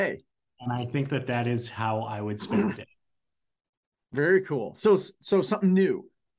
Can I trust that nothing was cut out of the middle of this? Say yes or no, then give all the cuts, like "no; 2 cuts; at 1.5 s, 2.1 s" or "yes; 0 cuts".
yes; 0 cuts